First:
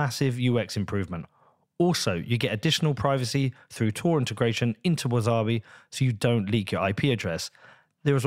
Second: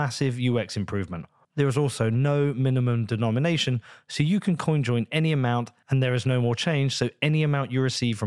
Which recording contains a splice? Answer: second; 1 cut; at 1.4 s

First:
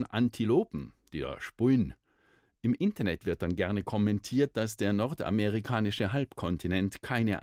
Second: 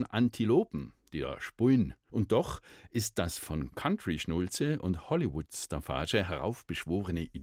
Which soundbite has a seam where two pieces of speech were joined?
second; 1 cut; at 2.1 s

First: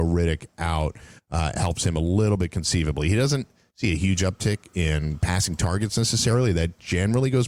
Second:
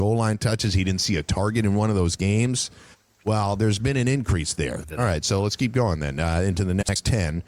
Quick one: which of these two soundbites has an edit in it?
second; 1 cut; at 4.8 s

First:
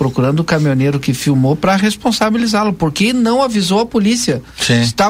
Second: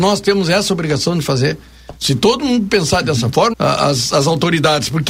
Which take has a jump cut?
second; 2 cuts; at 2.0 s, 3.5 s

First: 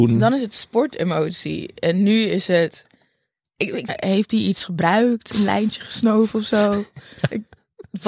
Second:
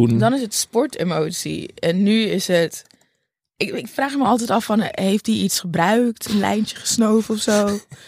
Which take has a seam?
first; 1 cut; at 3.9 s

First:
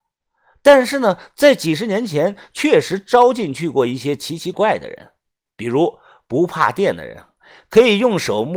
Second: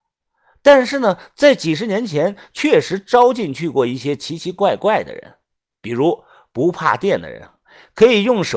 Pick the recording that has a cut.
first; 1 cut; at 4.5 s

